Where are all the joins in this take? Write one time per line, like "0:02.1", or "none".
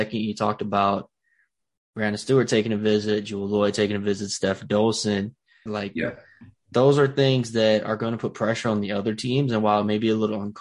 0:05.7